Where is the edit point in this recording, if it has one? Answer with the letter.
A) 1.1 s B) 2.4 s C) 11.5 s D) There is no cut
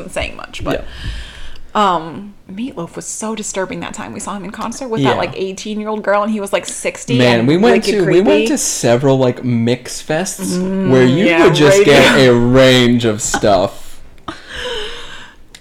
B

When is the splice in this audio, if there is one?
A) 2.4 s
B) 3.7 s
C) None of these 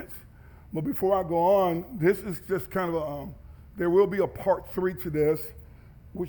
C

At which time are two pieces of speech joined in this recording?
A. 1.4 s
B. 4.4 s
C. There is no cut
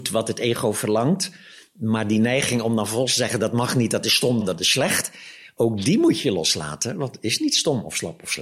B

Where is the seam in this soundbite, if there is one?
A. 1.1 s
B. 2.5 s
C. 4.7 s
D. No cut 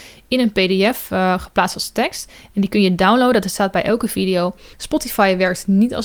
C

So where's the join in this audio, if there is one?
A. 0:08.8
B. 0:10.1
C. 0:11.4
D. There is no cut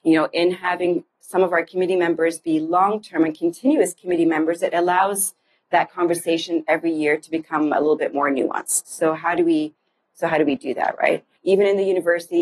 C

